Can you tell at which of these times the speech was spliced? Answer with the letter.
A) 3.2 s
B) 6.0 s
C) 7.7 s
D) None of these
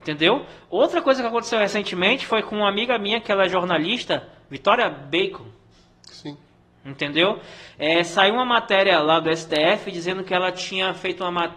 D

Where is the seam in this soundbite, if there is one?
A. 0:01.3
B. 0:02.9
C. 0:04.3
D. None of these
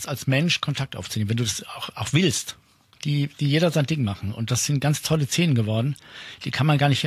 B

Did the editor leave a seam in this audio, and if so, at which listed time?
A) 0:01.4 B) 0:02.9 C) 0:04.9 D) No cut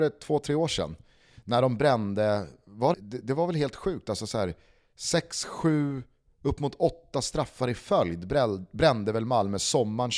B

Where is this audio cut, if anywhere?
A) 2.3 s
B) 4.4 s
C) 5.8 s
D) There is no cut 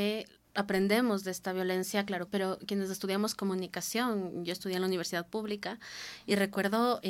A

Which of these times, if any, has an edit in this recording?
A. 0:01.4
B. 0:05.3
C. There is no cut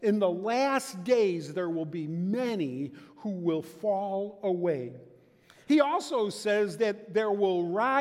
C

